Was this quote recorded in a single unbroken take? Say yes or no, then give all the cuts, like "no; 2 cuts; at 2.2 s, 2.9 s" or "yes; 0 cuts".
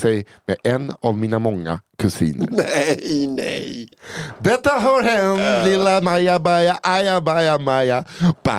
yes; 0 cuts